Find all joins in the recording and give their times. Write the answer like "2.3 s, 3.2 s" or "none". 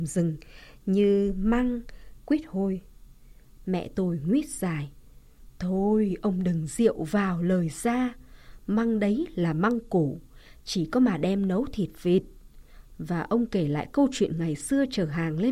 2.2 s, 3.6 s, 12.9 s